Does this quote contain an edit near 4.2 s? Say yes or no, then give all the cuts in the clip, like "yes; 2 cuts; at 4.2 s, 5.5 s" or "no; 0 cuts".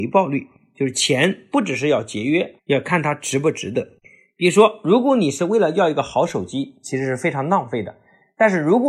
no; 1 cut; at 2.6 s